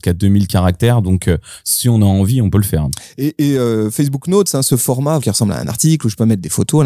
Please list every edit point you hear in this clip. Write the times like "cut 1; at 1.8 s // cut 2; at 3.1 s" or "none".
cut 1; at 5.2 s